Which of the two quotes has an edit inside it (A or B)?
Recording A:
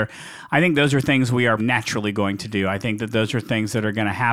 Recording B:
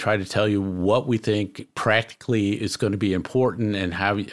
A